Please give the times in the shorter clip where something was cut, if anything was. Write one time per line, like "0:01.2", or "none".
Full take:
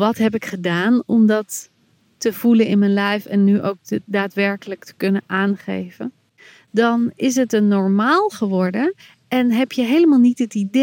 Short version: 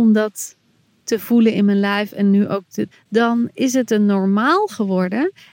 0:02.9